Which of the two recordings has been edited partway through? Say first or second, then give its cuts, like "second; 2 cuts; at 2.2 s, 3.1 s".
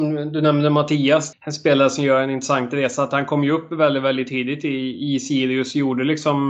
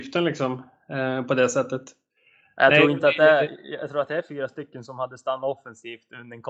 first; 1 cut; at 1.3 s